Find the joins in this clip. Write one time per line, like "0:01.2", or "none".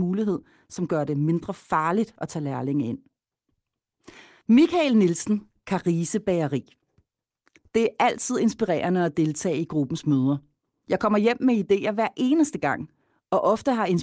none